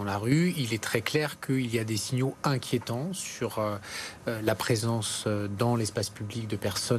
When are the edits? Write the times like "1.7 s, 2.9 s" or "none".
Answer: none